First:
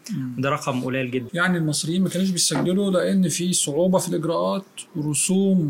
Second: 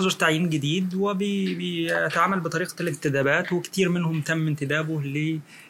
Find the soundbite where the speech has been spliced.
first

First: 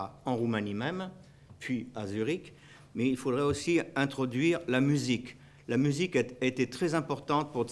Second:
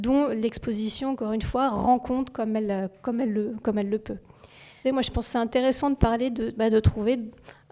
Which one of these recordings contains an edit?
second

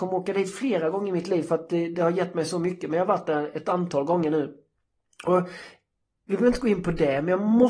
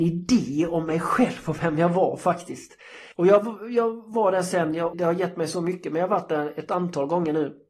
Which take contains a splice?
second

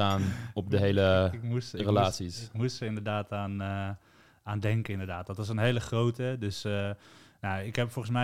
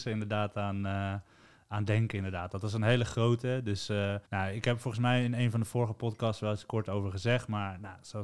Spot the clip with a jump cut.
second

